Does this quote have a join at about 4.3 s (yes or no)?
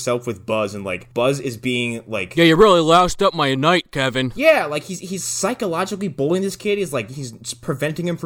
no